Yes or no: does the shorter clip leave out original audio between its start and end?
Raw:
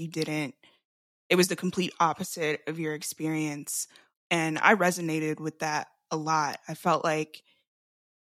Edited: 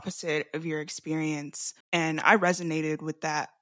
yes